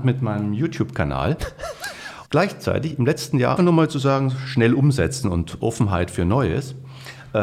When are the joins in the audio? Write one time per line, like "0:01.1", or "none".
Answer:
0:02.2
0:03.6